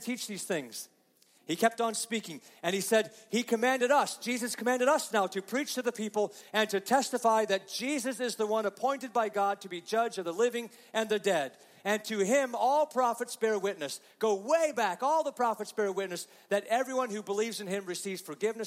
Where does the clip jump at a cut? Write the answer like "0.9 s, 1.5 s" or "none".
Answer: none